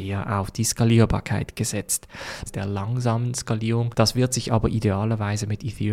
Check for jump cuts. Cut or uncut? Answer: cut